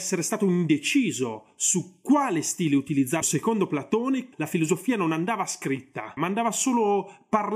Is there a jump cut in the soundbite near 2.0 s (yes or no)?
no